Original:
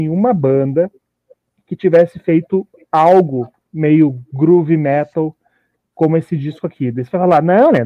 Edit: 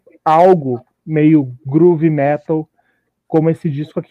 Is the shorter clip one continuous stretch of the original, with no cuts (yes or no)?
yes